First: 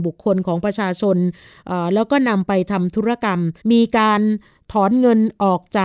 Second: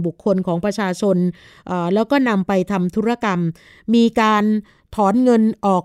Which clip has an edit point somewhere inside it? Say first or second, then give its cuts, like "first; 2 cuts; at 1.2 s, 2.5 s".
first; 1 cut; at 3.6 s